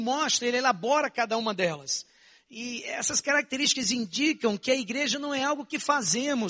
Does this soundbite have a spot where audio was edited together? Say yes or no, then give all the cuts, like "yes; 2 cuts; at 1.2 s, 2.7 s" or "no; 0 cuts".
no; 0 cuts